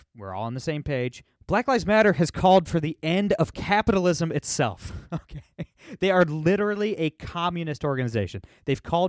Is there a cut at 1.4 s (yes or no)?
yes